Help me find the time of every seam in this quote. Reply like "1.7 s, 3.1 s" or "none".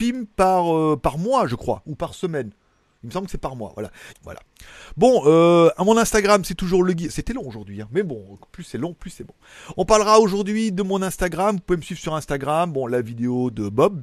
4.1 s

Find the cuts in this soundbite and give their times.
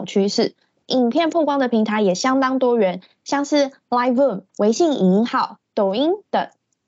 4.5 s

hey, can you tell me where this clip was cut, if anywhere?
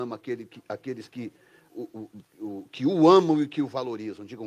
1.7 s

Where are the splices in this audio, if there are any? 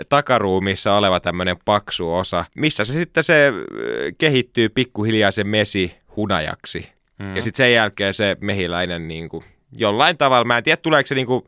2.5 s

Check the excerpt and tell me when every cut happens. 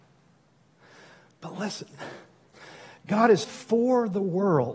3.4 s

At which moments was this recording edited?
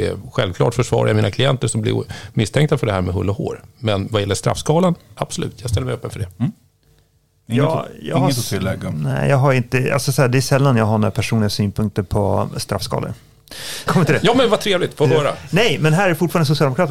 13.9 s

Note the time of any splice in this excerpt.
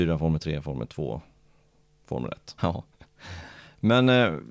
2.6 s

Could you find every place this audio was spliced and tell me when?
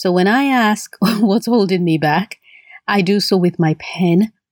none

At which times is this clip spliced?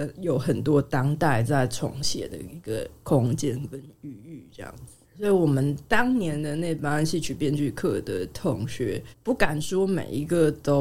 5.0 s, 9.1 s

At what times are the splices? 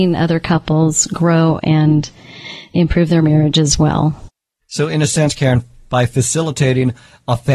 none

